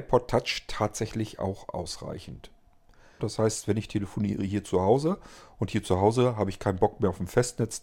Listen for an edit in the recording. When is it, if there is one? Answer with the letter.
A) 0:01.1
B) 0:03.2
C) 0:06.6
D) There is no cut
B